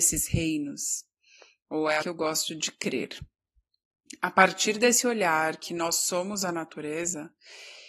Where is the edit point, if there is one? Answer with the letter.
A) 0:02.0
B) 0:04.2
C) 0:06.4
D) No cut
A